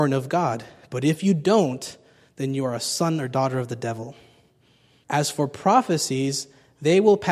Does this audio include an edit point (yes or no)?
yes